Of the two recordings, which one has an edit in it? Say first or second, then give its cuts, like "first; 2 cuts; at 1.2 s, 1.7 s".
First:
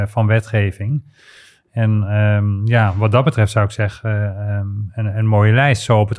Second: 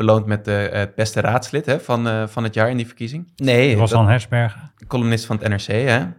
second; 1 cut; at 3.4 s